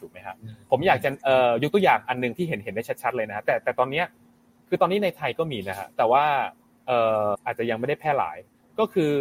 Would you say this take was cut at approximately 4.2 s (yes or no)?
no